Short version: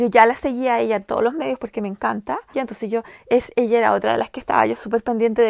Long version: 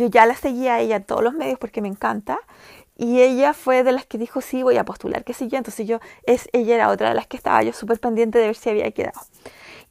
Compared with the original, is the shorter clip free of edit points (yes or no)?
no